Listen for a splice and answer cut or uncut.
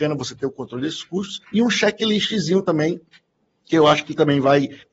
cut